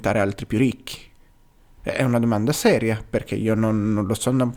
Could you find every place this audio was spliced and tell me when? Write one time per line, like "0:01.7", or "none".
0:01.8